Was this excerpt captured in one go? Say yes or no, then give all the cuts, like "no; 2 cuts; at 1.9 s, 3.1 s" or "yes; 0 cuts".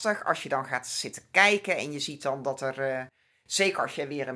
yes; 0 cuts